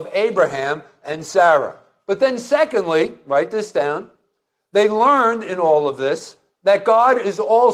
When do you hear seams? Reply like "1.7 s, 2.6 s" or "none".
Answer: none